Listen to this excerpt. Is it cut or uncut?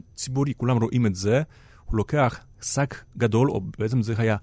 uncut